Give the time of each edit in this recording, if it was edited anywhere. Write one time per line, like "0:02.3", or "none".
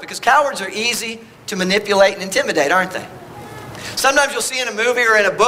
none